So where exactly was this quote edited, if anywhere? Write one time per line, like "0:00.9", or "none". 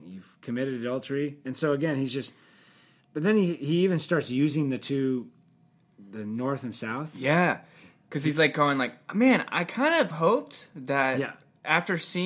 none